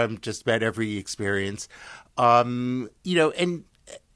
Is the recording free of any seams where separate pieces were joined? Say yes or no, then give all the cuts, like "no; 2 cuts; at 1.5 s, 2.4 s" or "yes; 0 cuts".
no; 1 cut; at 3.0 s